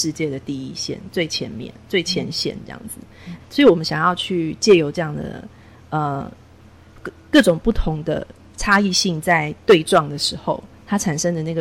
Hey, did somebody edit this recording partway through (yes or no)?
yes